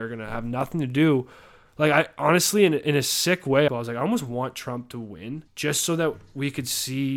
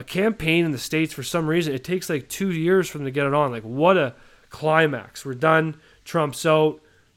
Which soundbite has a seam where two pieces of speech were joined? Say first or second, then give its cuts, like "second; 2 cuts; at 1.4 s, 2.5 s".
first; 2 cuts; at 3.7 s, 5.5 s